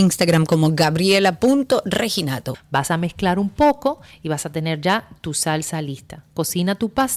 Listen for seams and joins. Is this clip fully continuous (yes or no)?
no